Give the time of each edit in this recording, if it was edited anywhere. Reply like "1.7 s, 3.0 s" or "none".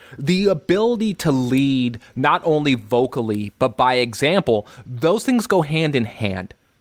none